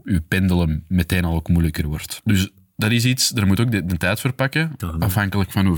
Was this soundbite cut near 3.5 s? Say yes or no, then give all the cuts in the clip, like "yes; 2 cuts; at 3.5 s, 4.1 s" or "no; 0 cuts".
no; 2 cuts; at 2.2 s, 4.8 s